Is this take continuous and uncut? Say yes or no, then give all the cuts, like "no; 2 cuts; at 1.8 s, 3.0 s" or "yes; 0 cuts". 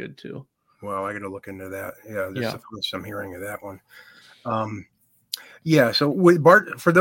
yes; 0 cuts